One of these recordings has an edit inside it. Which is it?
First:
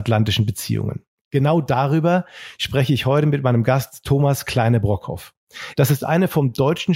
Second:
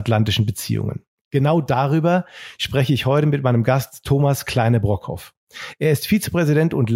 first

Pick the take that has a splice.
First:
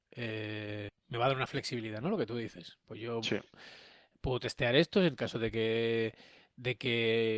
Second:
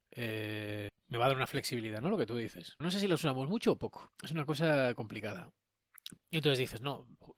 second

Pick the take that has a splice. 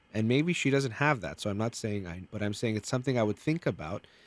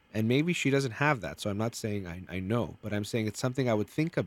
first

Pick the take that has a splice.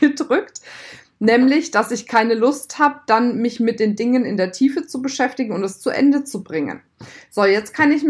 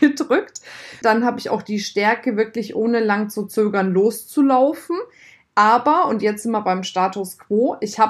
second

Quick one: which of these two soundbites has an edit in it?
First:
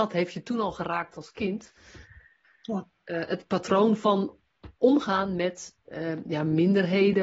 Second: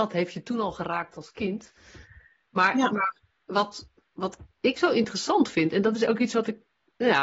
first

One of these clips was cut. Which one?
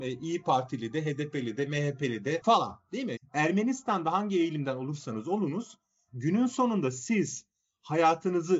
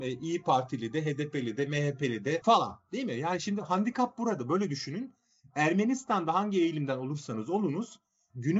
first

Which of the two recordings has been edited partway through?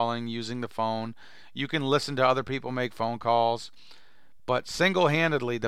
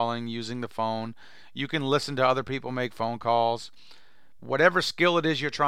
second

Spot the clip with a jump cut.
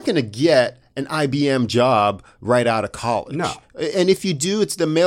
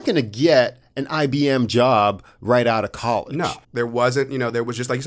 second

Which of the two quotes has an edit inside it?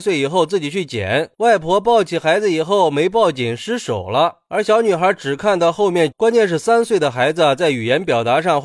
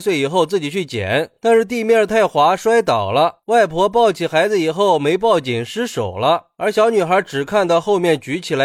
first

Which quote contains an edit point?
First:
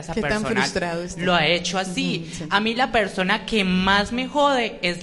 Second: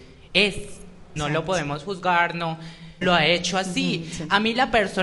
second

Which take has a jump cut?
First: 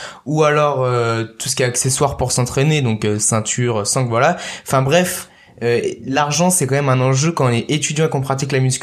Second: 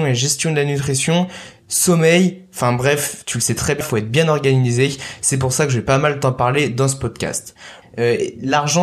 second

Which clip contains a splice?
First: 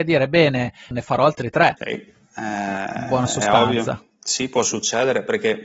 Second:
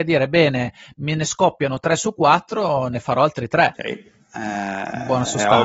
first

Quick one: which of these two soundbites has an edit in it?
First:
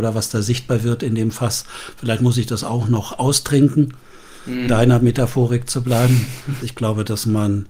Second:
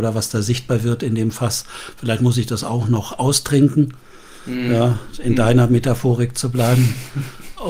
first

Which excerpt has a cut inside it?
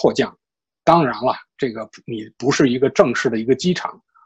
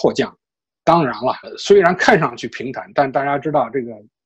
second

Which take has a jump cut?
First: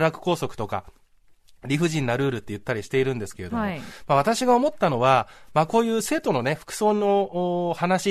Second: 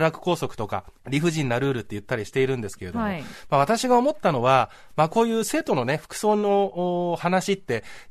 second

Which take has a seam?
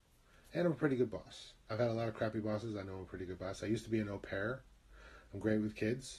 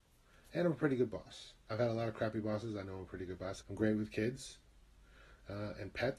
second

